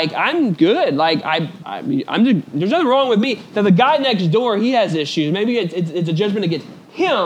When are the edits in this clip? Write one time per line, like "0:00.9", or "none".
0:01.6